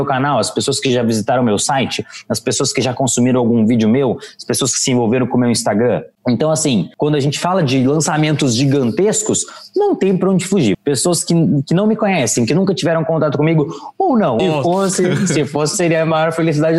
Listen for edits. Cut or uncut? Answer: cut